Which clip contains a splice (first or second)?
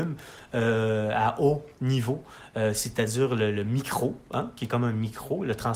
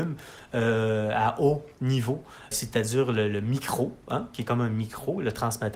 second